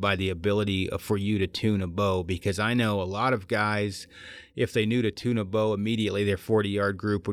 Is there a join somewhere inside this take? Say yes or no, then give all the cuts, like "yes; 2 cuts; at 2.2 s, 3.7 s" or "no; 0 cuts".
no; 0 cuts